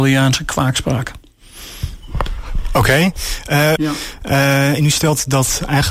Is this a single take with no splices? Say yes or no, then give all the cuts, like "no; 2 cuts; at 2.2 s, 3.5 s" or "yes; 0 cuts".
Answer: no; 1 cut; at 3.8 s